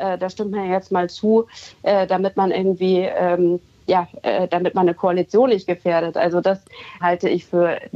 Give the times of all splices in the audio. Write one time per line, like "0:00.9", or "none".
0:07.0